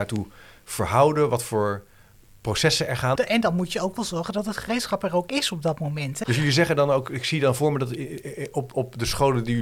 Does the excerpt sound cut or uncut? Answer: cut